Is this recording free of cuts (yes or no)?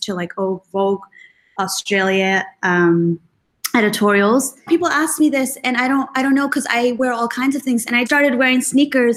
no